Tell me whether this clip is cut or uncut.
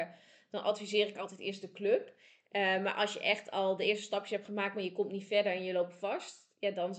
uncut